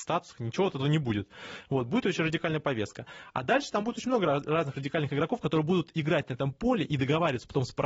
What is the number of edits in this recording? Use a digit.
0